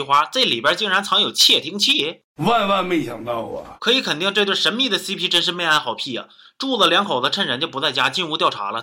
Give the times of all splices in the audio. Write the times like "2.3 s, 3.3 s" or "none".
none